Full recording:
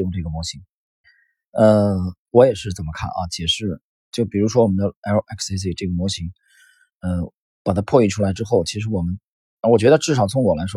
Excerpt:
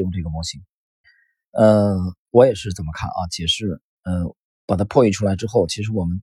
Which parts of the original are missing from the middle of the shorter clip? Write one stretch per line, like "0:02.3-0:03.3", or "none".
0:04.0-0:06.9